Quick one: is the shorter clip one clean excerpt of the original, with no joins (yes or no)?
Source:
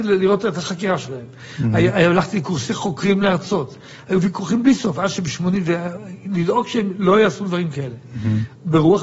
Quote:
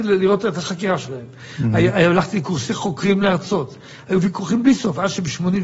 yes